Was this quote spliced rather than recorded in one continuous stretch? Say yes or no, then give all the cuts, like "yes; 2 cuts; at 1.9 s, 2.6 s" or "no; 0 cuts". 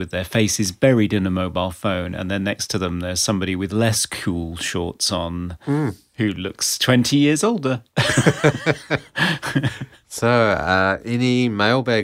no; 0 cuts